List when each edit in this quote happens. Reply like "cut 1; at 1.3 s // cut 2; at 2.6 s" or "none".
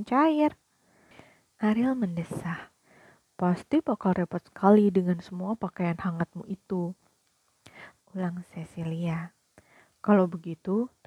cut 1; at 8.0 s